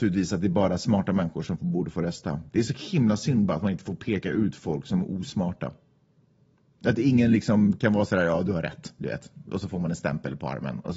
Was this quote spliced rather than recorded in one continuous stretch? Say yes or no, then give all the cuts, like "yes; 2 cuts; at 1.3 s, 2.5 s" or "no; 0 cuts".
no; 0 cuts